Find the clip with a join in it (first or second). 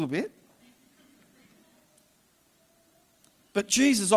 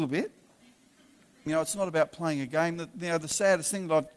second